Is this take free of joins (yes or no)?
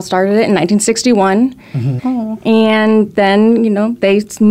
no